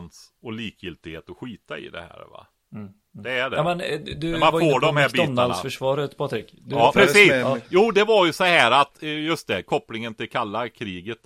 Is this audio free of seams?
no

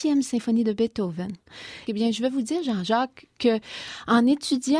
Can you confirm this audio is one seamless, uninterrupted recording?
no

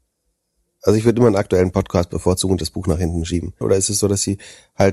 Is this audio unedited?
no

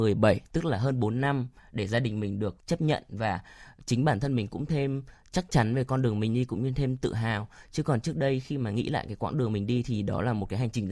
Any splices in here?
yes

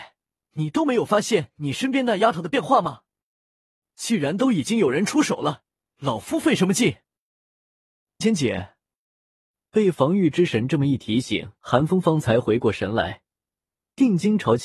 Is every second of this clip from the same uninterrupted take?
no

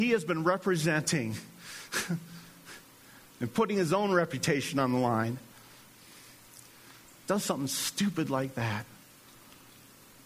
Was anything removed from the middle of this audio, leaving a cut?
no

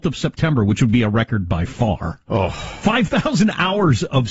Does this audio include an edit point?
no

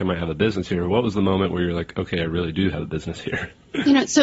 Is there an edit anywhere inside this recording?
no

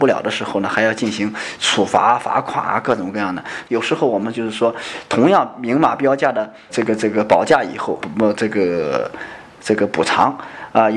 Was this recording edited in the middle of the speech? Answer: yes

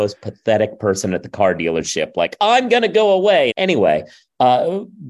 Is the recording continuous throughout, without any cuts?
no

